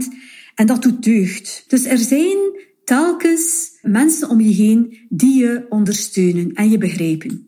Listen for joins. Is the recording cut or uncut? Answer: cut